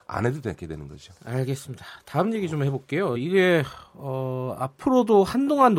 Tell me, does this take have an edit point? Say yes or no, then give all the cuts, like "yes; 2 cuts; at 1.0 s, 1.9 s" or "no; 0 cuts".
no; 0 cuts